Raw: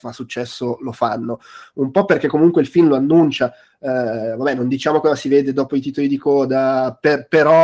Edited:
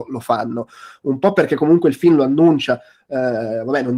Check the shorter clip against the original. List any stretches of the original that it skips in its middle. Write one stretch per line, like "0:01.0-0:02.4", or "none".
none